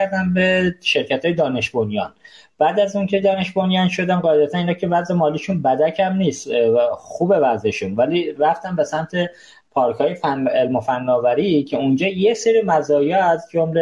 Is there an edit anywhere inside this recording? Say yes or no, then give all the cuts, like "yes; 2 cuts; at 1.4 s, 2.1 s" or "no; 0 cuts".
no; 0 cuts